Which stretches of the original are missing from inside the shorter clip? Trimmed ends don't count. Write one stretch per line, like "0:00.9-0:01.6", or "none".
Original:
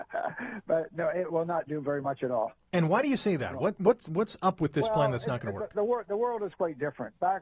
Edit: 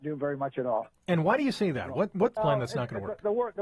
0:04.0-0:04.9